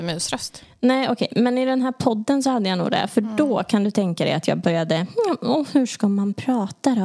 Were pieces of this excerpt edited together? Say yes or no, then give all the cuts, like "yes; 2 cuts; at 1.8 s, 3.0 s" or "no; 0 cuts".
no; 0 cuts